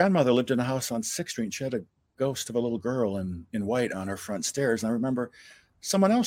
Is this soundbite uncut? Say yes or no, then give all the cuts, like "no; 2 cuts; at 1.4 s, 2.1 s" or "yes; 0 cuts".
yes; 0 cuts